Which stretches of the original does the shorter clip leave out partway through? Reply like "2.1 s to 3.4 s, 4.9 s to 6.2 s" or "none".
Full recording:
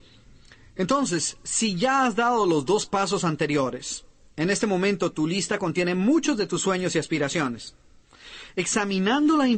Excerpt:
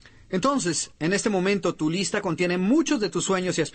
1.4 s to 4.3 s